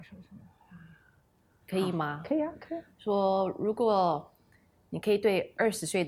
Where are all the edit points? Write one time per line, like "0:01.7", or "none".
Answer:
0:01.6